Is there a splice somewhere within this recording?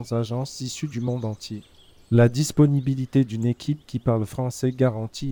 no; 0 cuts

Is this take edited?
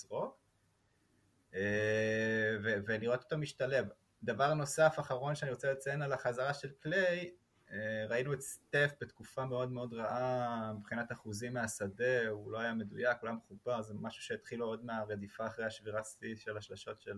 no; 0 cuts

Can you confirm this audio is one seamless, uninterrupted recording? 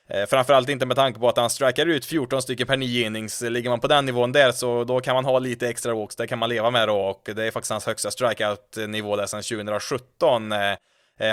yes; 0 cuts

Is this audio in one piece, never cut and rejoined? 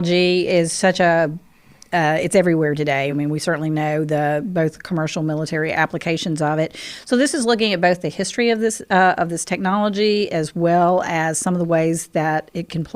yes; 0 cuts

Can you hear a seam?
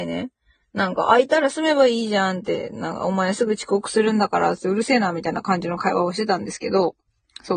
no; 0 cuts

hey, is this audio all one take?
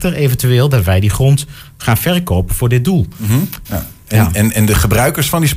no; 1 cut; at 3.6 s

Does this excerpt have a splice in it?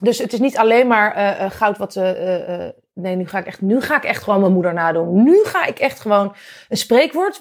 no; 0 cuts

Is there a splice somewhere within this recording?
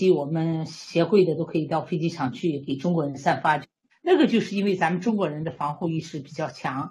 yes; 1 cut; at 3.9 s

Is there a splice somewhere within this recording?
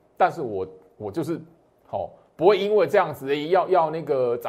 no; 0 cuts

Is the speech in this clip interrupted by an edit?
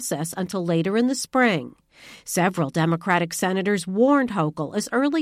no; 0 cuts

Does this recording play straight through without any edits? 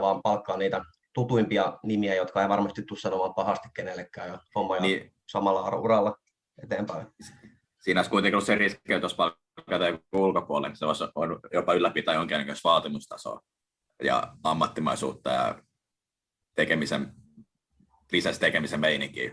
yes; 0 cuts

